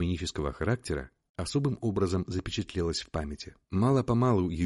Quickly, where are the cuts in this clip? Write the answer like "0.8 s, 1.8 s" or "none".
3.6 s